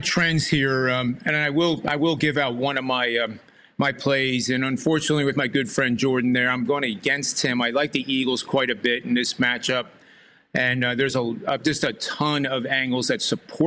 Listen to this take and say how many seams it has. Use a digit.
0